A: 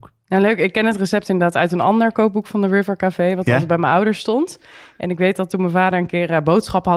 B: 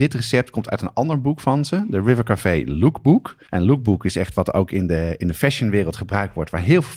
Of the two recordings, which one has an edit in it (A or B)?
B